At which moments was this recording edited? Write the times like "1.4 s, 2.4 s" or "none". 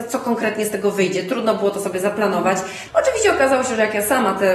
2.9 s